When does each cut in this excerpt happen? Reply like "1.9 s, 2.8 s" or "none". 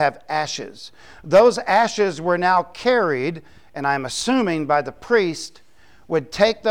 none